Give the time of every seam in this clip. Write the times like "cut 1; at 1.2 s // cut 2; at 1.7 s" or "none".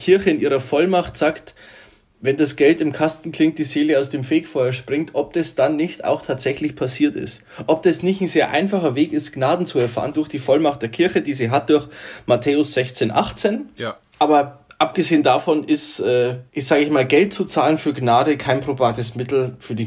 cut 1; at 13.8 s // cut 2; at 16.5 s

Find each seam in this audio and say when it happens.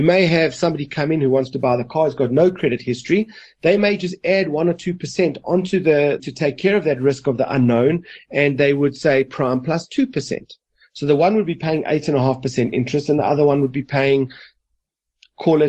cut 1; at 6.2 s

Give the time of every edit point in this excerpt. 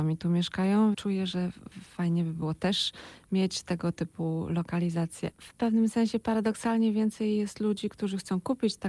cut 1; at 0.9 s // cut 2; at 5.3 s

